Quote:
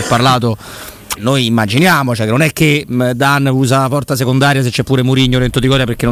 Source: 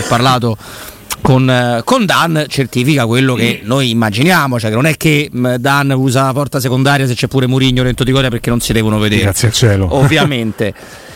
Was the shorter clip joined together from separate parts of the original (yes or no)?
yes